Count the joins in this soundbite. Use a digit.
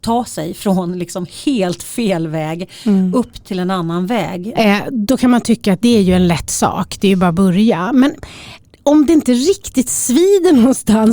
1